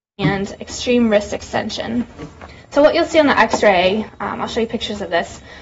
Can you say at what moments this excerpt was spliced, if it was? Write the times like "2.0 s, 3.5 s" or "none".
4.1 s

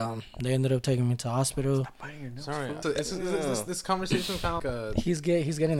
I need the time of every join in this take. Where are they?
2.8 s, 4.6 s

